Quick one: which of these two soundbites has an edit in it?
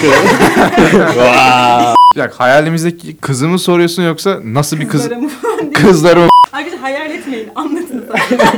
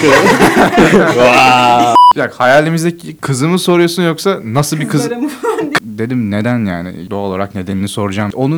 second; 1 cut; at 5.8 s

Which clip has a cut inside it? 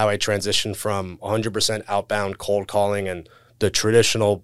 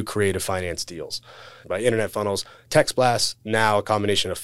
second; 2 cuts; at 1.6 s, 3.4 s

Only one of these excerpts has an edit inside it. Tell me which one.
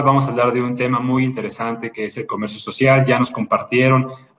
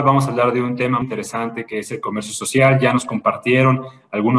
second; 1 cut; at 1.0 s

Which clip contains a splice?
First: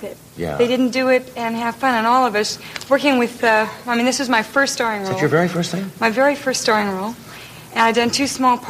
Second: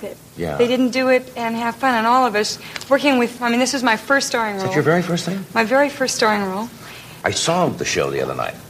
second; 2 cuts; at 3.4 s, 7.2 s

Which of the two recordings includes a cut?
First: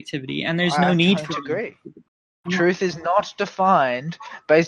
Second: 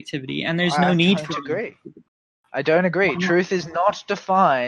first; 1 cut; at 2.4 s

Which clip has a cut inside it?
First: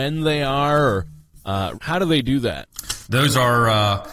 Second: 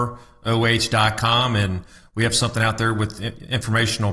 first; 2 cuts; at 1.7 s, 3.1 s

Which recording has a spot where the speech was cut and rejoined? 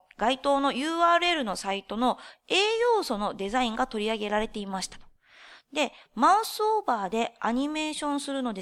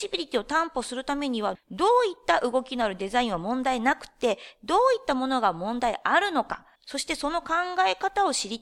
second; 1 cut; at 6.7 s

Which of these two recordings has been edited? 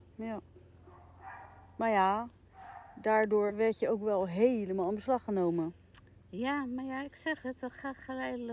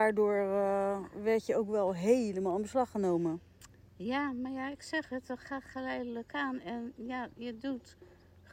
first; 1 cut; at 3.5 s

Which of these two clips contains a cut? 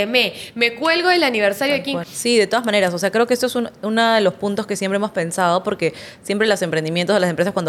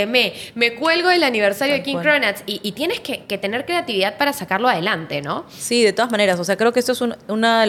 first; 1 cut; at 2.0 s

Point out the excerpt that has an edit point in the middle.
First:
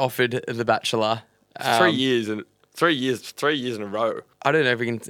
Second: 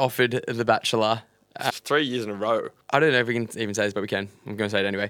second; 1 cut; at 1.7 s

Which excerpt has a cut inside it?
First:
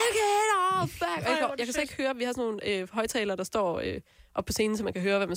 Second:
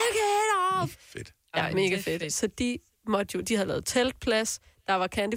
second; 2 cuts; at 0.9 s, 2.3 s

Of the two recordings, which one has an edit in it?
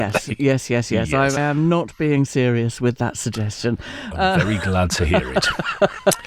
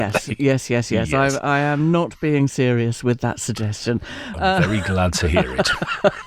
first; 1 cut; at 1.4 s

